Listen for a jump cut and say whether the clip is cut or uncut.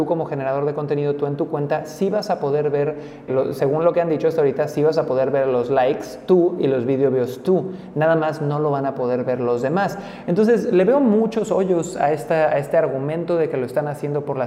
cut